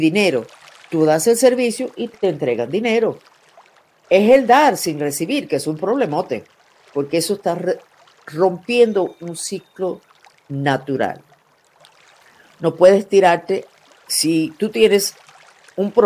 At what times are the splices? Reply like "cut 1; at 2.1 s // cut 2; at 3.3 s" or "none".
cut 1; at 4.0 s